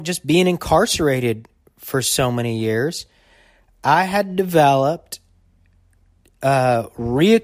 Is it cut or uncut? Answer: uncut